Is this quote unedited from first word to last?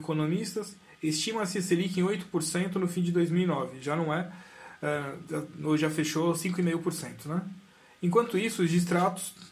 yes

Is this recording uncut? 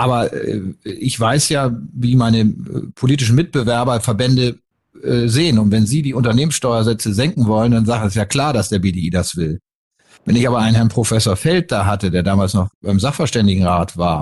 yes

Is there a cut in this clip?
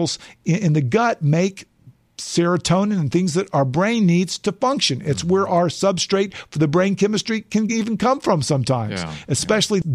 no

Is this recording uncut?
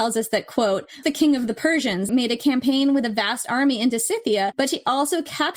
no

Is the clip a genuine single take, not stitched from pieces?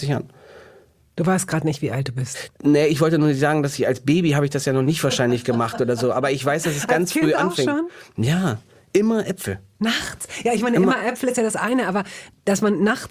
yes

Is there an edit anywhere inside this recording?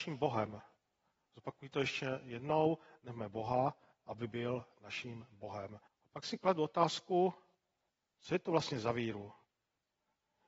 yes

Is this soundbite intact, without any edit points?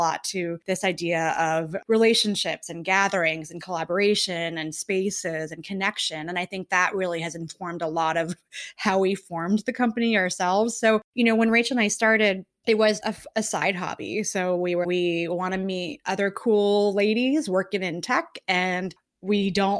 no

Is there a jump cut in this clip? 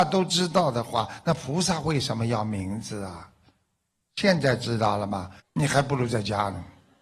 yes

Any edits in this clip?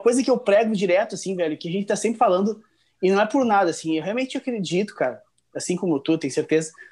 no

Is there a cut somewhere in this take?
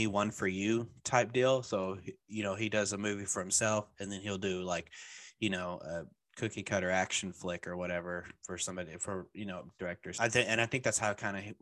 no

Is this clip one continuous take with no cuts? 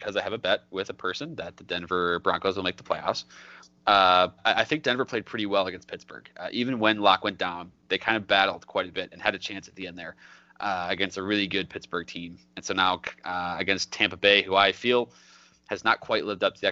no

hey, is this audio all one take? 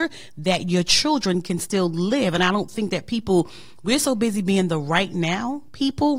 yes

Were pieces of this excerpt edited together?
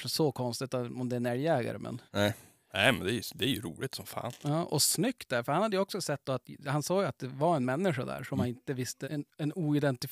yes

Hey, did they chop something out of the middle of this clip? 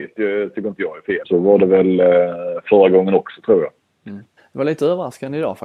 yes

